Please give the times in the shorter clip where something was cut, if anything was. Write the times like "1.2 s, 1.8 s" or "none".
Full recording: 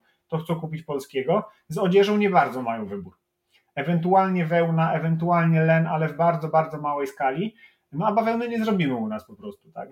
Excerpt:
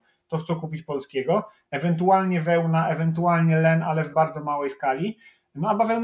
1.7 s, 4.1 s